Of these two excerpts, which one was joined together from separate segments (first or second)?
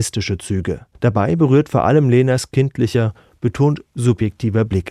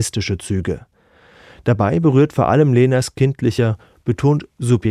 first